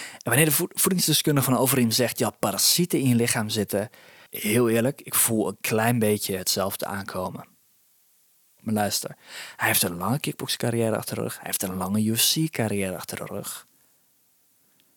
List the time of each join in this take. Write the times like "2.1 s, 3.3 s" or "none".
4.3 s, 8.6 s